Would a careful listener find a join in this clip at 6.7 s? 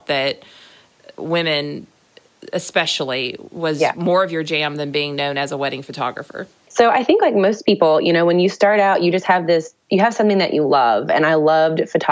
yes; 1 cut; at 6.7 s

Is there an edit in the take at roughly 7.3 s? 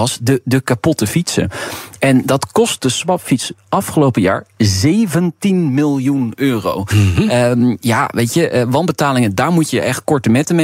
no; 0 cuts

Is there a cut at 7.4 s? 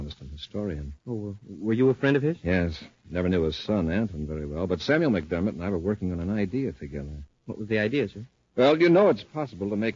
no; 1 cut; at 1.0 s

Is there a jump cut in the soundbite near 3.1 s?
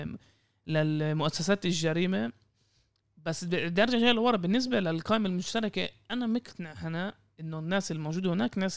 no; 0 cuts

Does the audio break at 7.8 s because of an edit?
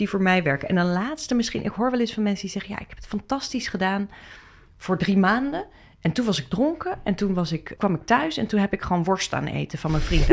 yes; 1 cut; at 7.8 s

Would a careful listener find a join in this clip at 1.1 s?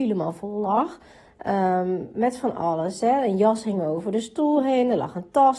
no; 0 cuts

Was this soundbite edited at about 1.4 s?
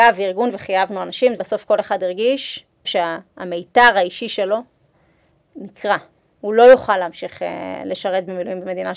yes; 2 cuts; at 1.4 s, 2.8 s

